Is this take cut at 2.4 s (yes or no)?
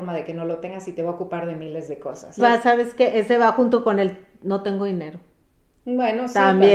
yes